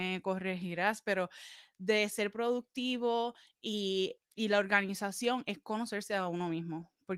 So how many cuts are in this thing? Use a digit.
1